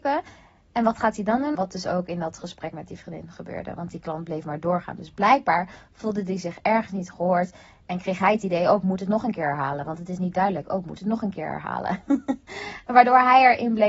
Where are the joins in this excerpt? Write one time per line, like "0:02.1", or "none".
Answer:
0:01.5